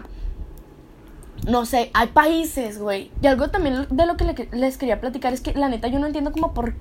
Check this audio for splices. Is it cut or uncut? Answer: cut